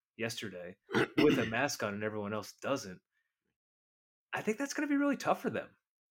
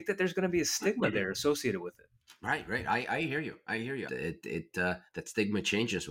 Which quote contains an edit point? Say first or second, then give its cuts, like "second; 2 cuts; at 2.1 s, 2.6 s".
second; 1 cut; at 4.1 s